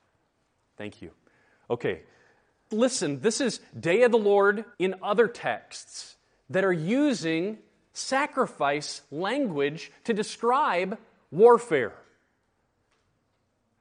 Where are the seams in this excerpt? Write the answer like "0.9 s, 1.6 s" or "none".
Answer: 2.7 s, 4.7 s